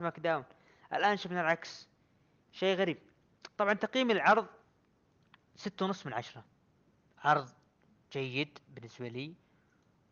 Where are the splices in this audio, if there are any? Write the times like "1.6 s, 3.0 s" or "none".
none